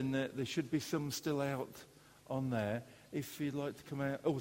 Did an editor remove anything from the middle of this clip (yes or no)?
no